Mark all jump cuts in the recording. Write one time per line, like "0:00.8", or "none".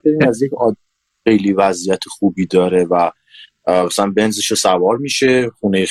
none